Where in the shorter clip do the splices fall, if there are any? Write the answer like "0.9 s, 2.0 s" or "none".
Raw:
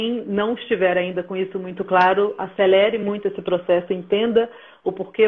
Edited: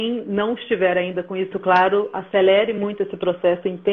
1.5 s